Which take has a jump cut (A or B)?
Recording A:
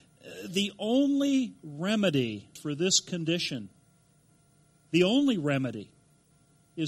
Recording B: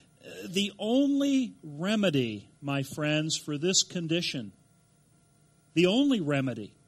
A